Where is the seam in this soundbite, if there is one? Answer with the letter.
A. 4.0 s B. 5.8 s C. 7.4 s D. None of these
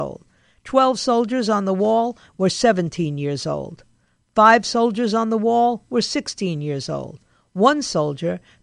D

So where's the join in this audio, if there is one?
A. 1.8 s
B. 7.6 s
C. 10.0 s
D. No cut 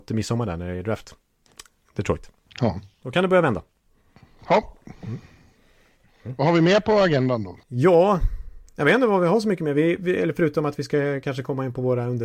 B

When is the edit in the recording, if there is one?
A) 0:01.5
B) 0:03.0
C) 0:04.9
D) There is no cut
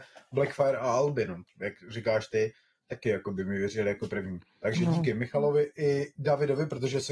D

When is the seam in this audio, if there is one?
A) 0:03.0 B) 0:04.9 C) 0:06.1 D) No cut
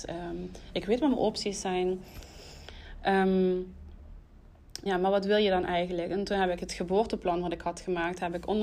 B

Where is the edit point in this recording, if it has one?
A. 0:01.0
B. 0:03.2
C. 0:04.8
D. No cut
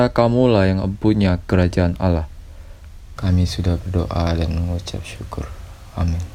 B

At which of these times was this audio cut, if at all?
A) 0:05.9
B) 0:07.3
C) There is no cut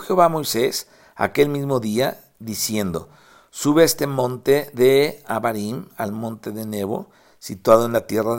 C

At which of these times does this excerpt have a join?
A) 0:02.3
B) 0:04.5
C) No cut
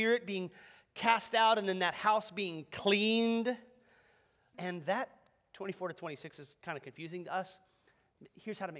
B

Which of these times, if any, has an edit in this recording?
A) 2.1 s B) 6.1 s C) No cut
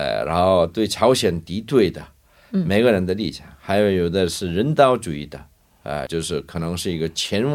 B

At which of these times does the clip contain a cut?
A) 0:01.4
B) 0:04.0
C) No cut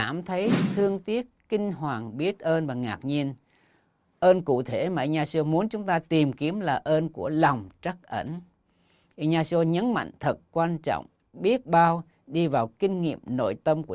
C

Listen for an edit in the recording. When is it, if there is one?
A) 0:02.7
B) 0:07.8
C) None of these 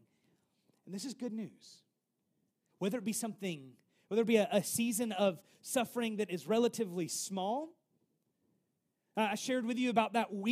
A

